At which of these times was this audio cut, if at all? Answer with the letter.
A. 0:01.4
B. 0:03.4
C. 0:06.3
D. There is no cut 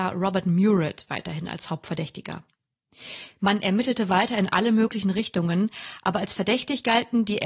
B